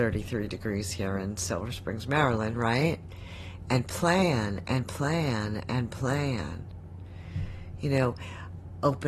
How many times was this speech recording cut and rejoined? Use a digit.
0